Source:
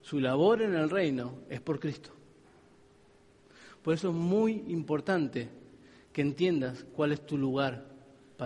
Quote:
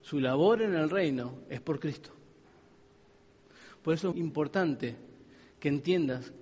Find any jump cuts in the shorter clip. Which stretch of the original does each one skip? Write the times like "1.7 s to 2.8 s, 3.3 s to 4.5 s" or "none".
4.1 s to 4.7 s